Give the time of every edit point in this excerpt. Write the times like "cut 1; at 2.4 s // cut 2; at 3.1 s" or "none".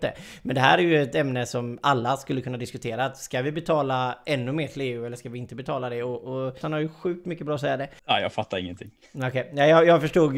cut 1; at 6.6 s // cut 2; at 8.0 s